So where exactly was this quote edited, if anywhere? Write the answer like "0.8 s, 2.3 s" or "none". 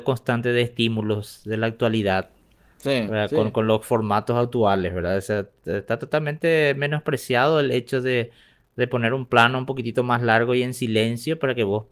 none